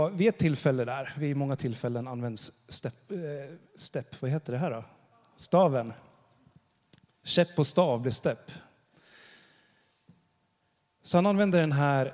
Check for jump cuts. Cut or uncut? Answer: uncut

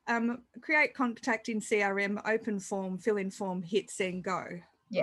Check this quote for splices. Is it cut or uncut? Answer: uncut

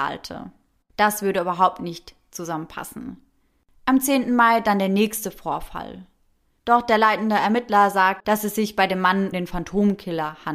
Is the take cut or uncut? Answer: cut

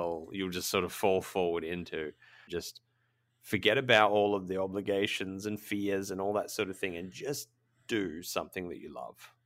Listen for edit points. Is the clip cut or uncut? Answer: cut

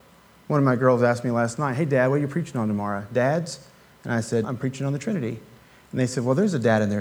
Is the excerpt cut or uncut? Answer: cut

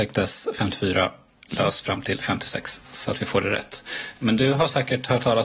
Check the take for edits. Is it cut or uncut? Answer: cut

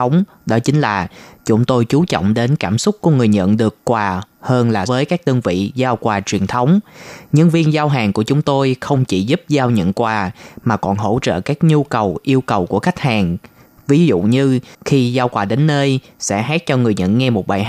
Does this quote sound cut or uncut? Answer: cut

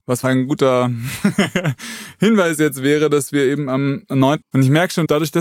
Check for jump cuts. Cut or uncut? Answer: cut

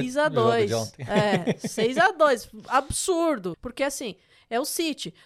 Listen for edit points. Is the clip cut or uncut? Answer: cut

